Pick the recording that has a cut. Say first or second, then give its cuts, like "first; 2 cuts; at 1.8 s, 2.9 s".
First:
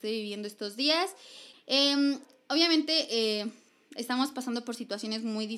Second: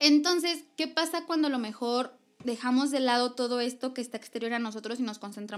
first; 1 cut; at 1.5 s